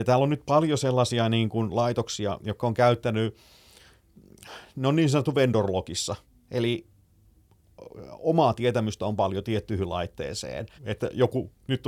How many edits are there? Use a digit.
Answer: 1